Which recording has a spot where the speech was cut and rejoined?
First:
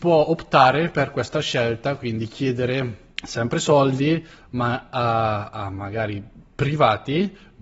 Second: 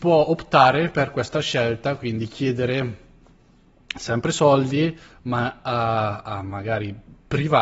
first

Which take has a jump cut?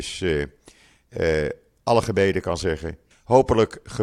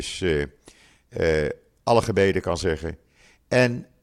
first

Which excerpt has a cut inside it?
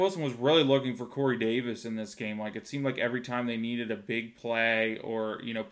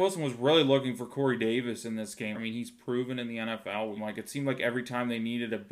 second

